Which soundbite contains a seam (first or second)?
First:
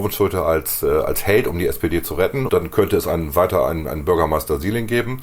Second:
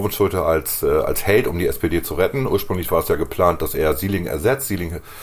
first